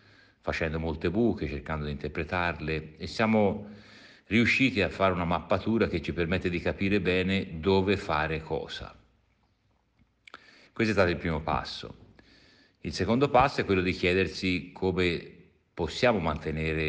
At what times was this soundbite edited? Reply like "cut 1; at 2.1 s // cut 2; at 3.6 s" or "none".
none